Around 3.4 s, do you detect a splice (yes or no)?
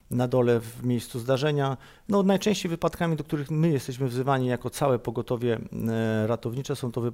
no